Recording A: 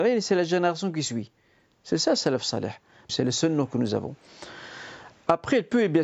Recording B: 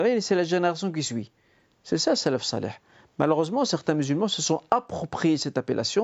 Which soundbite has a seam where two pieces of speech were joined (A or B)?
A